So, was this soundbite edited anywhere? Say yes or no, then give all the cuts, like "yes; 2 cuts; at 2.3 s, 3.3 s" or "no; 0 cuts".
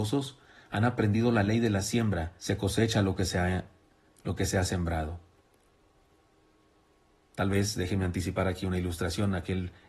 yes; 1 cut; at 2.4 s